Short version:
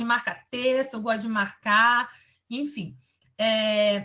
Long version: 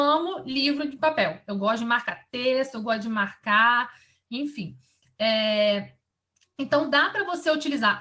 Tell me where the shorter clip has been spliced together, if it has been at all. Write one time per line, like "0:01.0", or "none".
none